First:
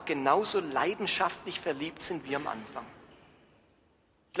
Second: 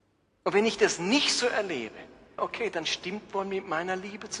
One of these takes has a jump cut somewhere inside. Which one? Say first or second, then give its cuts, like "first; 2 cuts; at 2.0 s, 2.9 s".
second; 1 cut; at 2.4 s